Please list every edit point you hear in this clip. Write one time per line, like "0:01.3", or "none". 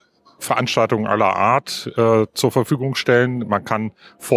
none